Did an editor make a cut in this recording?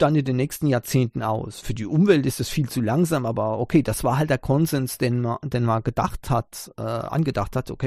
no; 0 cuts

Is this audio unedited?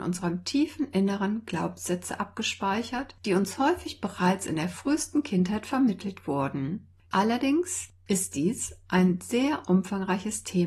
no; 1 cut; at 7.1 s

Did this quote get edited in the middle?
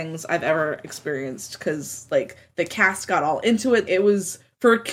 yes; 1 cut; at 3.9 s

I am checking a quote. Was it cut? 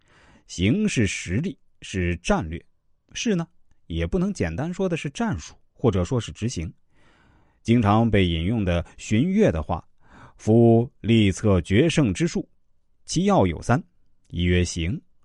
no; 0 cuts

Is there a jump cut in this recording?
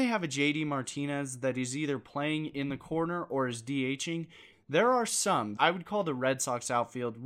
yes; 2 cuts; at 4.5 s, 5.6 s

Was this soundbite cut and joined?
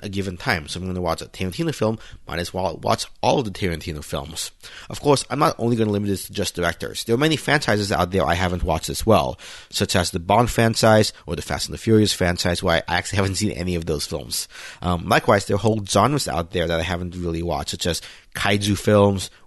no; 0 cuts

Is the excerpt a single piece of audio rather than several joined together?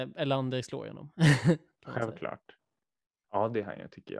no; 1 cut; at 3.2 s

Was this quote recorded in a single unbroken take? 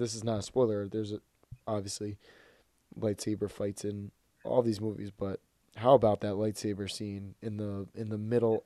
yes; 0 cuts

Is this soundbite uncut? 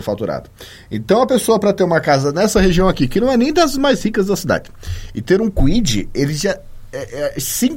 yes; 0 cuts

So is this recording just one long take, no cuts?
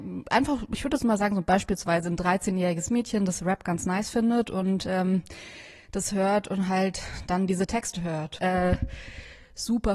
no; 1 cut; at 8.4 s

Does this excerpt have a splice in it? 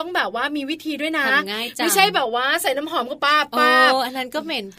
yes; 1 cut; at 3.2 s

